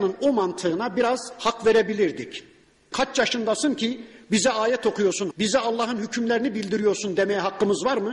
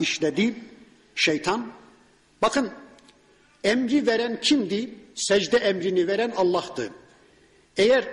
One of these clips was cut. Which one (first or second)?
first